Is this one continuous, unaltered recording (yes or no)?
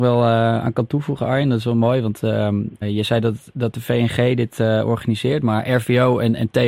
no